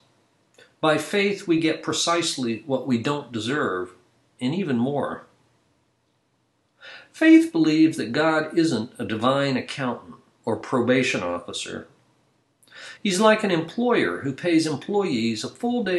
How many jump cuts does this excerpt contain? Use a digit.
1